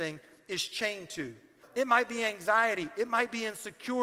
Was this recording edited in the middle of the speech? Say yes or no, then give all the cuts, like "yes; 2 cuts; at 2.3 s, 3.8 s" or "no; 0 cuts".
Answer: yes; 1 cut; at 1.6 s